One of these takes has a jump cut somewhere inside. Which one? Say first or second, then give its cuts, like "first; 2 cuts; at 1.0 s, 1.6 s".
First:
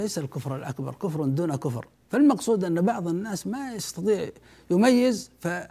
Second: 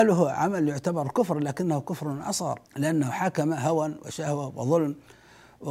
second; 1 cut; at 2.6 s